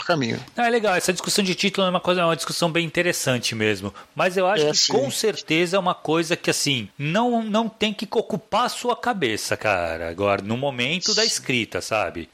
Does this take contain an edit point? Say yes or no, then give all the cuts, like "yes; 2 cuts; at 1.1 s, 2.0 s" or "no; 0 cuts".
no; 0 cuts